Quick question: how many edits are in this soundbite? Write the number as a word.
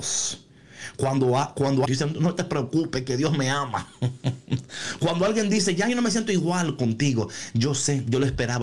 one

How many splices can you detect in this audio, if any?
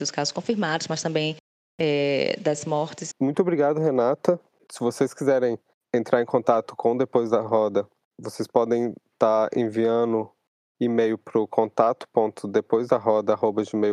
one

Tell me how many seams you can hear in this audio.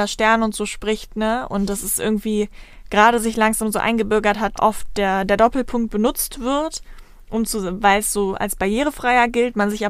one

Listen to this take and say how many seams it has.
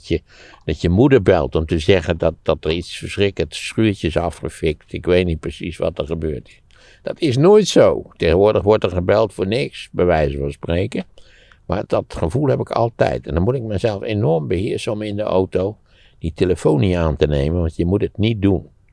one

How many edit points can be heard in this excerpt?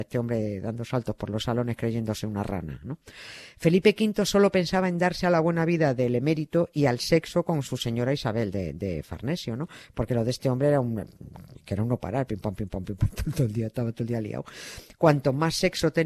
zero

